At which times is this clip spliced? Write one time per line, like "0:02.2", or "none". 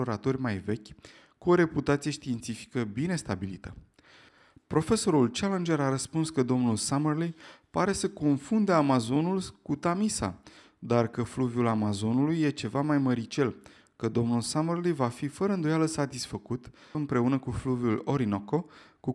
0:16.9